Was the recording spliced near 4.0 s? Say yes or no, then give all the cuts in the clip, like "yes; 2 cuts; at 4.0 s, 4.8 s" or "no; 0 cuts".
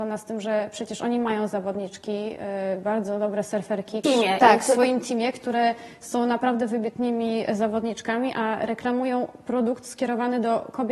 yes; 1 cut; at 4.0 s